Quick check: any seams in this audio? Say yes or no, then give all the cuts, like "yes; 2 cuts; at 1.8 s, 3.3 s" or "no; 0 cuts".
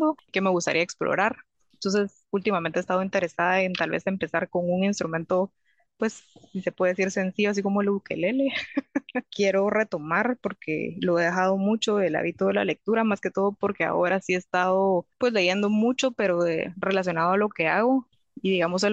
yes; 1 cut; at 9.3 s